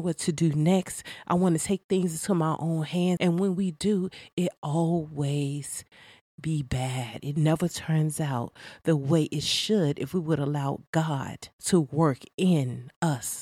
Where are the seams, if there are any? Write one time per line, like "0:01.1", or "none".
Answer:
0:03.2
0:11.6